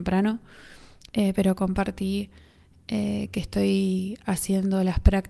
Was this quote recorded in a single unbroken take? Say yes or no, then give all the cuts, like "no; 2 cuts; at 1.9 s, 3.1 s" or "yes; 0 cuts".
no; 1 cut; at 1.1 s